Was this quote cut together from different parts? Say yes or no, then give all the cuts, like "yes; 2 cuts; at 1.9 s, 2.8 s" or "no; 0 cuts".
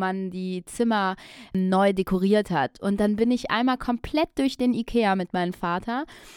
no; 0 cuts